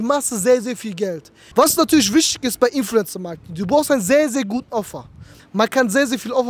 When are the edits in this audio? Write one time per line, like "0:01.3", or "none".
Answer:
0:01.5
0:05.4